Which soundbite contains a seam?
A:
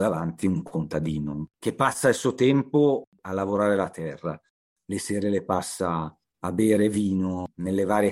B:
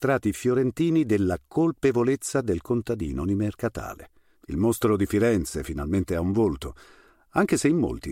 B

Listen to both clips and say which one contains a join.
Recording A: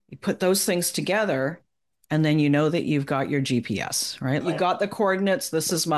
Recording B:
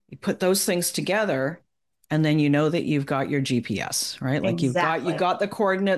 A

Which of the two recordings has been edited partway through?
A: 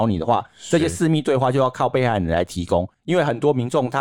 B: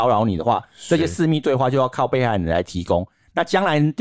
A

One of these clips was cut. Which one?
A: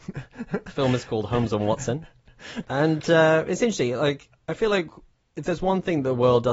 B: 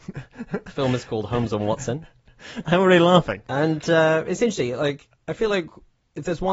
A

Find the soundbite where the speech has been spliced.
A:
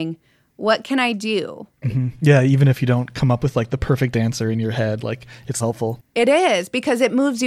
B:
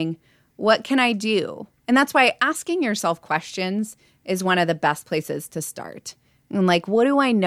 A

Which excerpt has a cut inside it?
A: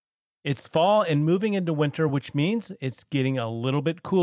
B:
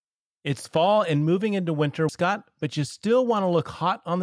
B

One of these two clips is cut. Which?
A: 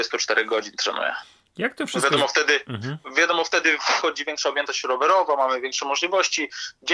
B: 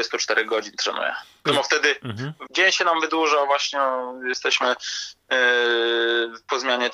B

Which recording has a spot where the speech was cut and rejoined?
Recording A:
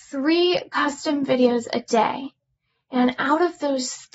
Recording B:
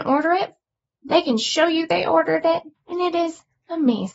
B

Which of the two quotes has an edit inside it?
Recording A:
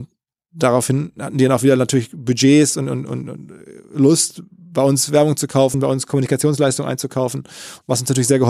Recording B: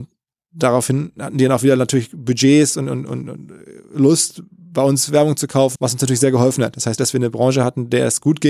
B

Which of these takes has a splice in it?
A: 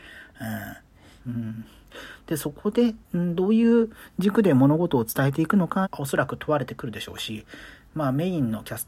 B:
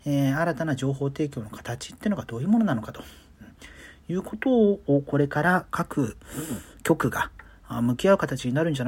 A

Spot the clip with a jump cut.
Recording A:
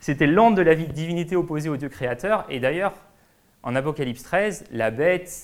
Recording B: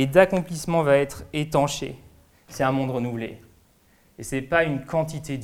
B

